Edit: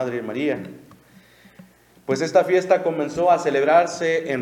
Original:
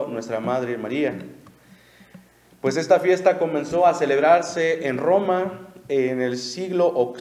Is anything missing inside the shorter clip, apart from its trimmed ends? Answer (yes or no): no